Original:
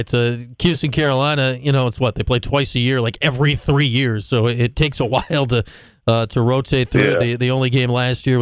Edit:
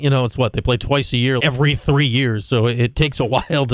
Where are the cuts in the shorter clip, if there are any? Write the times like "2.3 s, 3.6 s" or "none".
1.4 s